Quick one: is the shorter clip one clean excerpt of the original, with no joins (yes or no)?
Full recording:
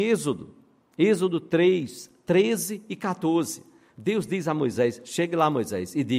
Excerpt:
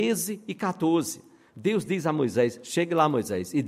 yes